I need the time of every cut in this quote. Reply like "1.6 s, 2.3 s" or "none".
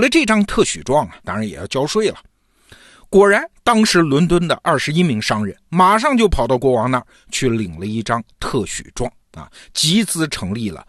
1.2 s